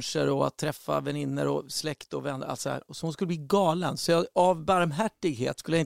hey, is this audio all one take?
yes; 0 cuts

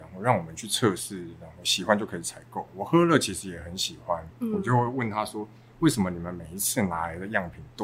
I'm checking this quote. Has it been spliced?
yes; 2 cuts; at 2.7 s, 4.3 s

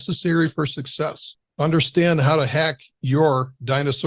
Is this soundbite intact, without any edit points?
yes; 0 cuts

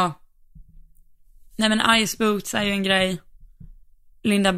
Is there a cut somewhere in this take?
no; 0 cuts

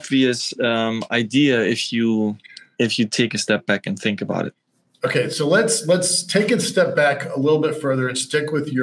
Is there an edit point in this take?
no; 0 cuts

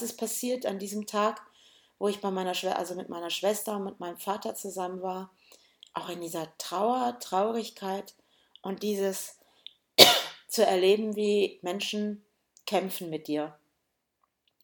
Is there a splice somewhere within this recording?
no; 0 cuts

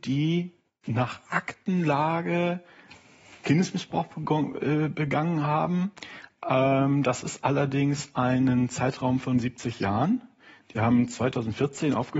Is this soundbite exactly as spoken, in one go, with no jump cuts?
yes; 0 cuts

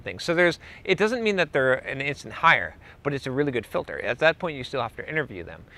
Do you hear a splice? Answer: no; 0 cuts

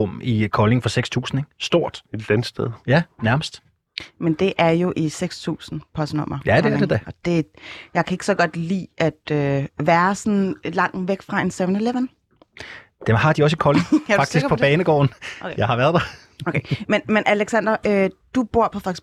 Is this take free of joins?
yes; 0 cuts

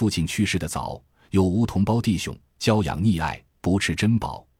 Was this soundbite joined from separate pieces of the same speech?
yes; 1 cut; at 2.5 s

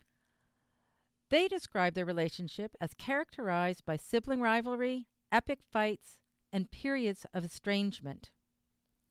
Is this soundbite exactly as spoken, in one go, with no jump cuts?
yes; 0 cuts

